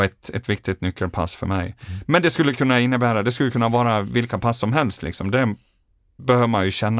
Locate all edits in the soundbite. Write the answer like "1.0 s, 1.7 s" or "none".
none